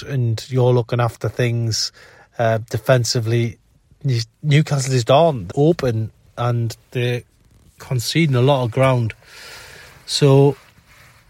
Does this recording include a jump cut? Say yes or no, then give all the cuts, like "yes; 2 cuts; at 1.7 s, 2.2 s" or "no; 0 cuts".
yes; 1 cut; at 5.5 s